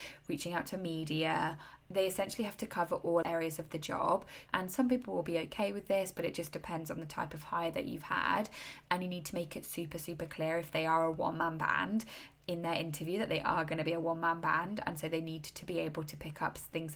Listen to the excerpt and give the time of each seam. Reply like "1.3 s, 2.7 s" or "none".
4.5 s